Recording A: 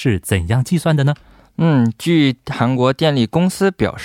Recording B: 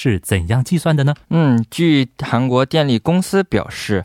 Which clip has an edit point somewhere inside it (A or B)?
B